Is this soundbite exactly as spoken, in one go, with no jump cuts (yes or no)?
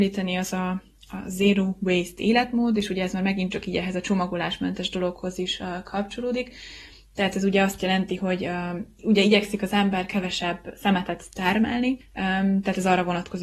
yes